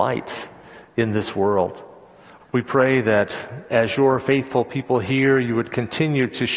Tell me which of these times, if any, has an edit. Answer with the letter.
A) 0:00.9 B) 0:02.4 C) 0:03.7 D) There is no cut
B